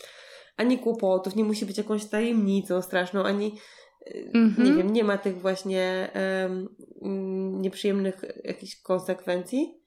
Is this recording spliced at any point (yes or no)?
no